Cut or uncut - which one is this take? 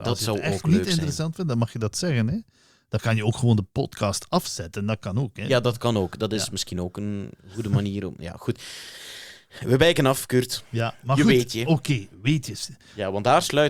uncut